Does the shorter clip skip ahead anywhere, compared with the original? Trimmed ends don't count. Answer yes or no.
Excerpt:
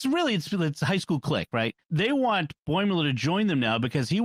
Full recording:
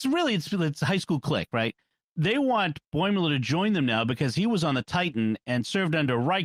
yes